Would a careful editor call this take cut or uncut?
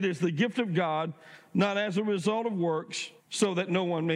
cut